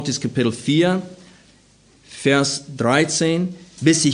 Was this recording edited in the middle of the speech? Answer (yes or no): no